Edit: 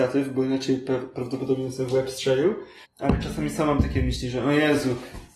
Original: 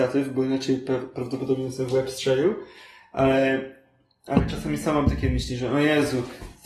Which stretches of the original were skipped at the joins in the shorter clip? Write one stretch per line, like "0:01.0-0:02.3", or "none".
0:02.8-0:04.1

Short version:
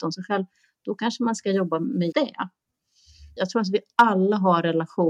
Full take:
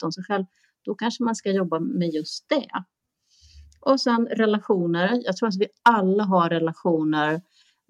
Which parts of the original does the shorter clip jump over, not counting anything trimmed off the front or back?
0:02.1-0:02.5
0:03.7-0:05.2

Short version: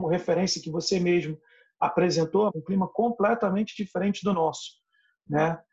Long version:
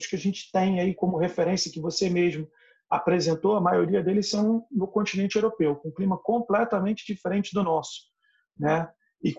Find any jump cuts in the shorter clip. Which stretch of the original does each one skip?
0:03.6-0:05.8

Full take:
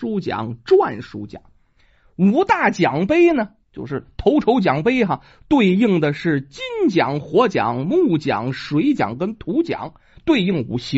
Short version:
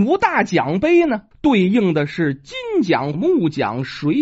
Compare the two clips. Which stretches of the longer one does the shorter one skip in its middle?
0:03.6-0:05.4
0:07.2-0:07.8

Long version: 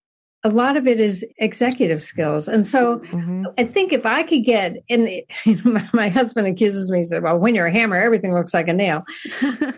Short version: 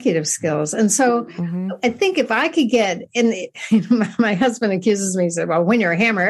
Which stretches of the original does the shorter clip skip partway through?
none

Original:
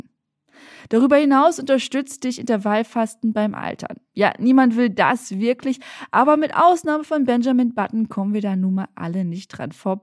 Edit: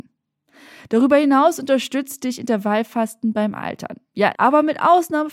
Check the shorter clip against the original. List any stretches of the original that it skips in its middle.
0:04.3-0:06.1

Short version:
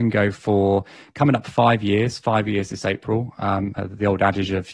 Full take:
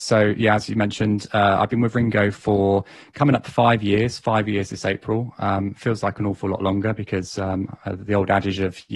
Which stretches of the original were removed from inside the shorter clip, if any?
0:05.7-0:07.8

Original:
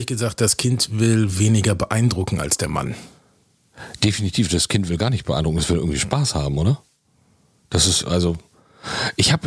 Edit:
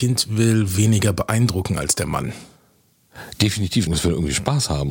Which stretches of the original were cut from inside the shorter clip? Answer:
0:04.5-0:05.5

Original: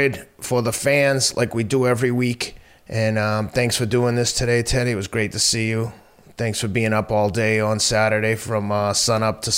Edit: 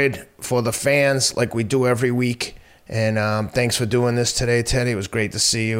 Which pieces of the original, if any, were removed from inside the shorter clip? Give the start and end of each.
none

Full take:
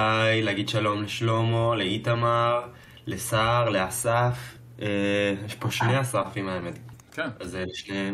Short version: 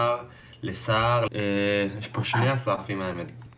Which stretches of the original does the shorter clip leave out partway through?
0:03.7-0:04.7

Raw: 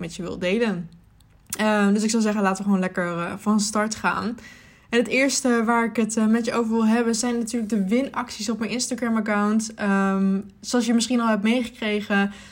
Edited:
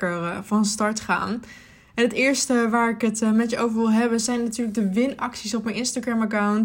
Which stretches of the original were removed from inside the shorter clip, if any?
none

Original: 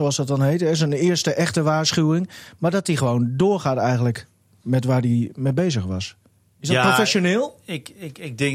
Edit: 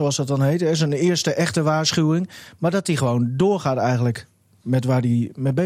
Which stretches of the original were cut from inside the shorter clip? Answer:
none

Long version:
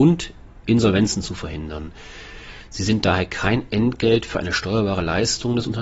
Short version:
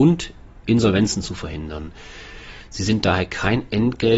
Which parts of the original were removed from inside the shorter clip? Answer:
none

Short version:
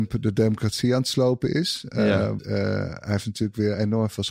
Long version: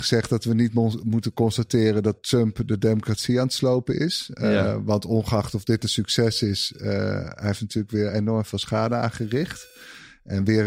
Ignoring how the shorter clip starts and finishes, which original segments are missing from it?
0:04.8-0:06.7

